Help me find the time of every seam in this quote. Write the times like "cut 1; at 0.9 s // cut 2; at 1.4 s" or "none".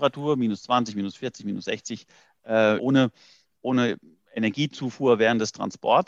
cut 1; at 2.8 s